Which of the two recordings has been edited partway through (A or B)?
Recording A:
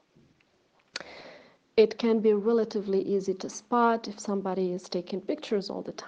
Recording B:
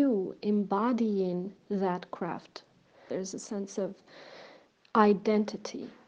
B